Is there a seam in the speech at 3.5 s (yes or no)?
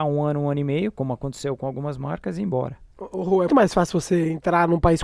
yes